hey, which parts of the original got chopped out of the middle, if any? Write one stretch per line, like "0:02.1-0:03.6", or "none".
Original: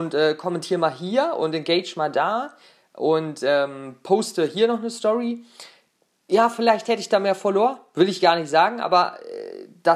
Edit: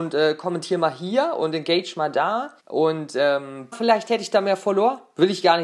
0:02.6-0:02.9
0:04.0-0:06.5